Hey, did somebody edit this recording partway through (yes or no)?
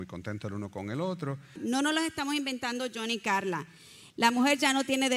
yes